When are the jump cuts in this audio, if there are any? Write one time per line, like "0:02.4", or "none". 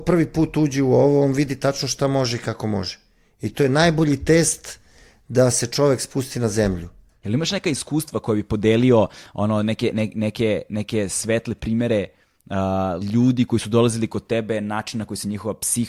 0:13.0